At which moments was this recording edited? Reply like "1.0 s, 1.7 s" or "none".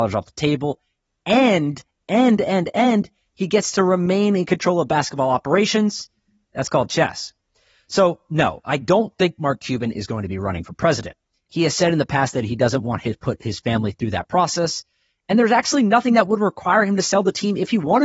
6.5 s